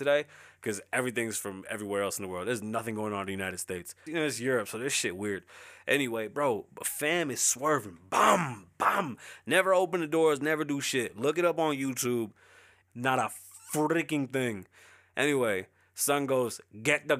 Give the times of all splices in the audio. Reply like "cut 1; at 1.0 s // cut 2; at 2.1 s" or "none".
cut 1; at 4.1 s // cut 2; at 8.7 s // cut 3; at 12.8 s